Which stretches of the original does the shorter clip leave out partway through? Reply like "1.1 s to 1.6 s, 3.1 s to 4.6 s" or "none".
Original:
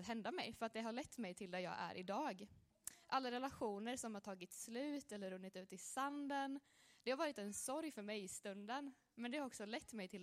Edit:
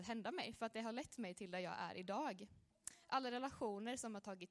none